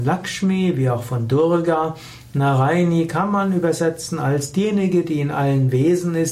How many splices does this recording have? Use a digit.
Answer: 0